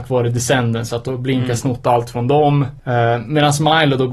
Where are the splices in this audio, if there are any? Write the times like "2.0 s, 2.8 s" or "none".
none